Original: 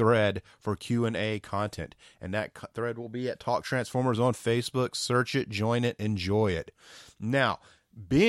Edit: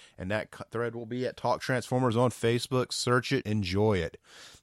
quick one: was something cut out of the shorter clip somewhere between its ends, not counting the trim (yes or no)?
yes